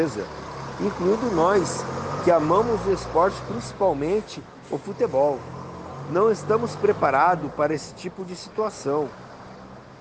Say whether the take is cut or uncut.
uncut